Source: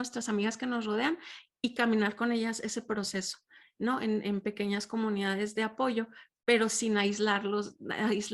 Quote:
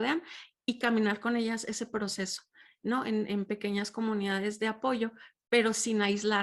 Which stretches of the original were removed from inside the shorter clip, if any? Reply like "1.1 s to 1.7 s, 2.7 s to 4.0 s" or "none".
none